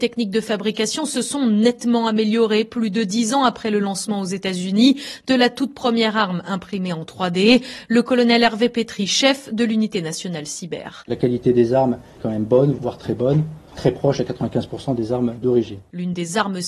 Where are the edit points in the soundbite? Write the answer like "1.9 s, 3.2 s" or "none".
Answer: none